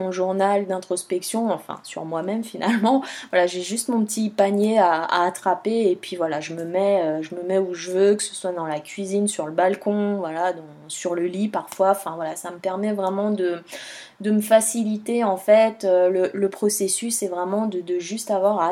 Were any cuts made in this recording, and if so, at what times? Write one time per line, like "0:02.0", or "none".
none